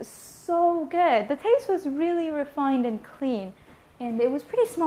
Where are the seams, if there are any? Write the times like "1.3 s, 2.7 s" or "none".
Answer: none